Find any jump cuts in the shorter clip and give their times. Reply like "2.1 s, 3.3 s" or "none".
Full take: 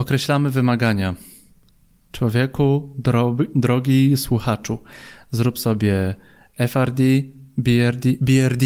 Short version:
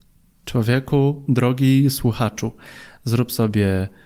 1.3 s